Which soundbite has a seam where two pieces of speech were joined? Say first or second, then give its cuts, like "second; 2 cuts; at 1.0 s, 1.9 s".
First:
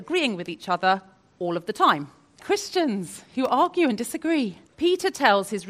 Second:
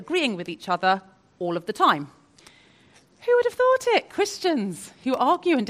first; 2 cuts; at 2.4 s, 4.7 s